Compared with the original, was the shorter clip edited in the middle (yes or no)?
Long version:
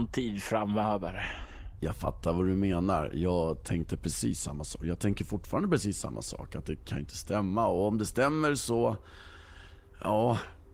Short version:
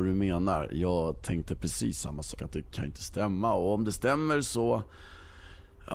yes